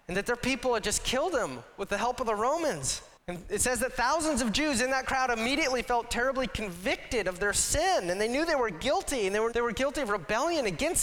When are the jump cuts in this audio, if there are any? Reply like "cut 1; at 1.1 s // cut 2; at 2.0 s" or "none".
cut 1; at 3.2 s // cut 2; at 9.5 s